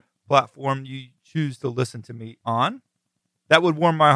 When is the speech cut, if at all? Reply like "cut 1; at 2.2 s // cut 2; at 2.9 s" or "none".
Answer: none